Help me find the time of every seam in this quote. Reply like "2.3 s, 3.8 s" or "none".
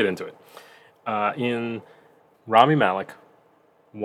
2.3 s